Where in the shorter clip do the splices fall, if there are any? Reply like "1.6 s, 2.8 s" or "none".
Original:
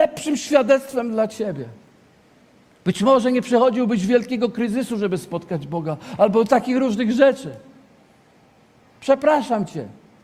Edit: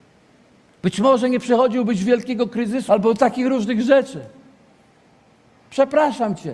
2.9 s